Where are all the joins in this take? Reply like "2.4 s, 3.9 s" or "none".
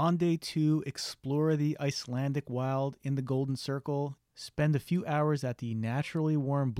4.2 s